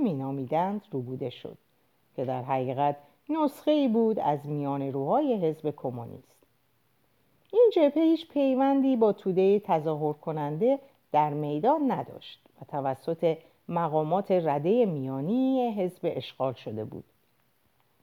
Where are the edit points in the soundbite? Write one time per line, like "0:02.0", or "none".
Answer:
none